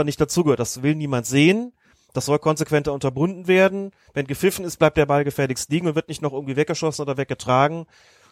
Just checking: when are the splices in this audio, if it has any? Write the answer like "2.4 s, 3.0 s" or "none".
none